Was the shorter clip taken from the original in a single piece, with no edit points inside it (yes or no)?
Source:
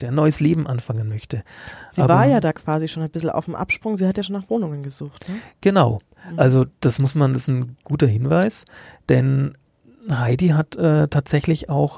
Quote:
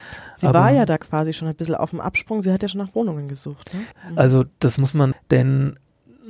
no